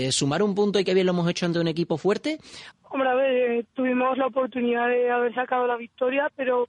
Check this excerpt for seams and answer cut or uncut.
cut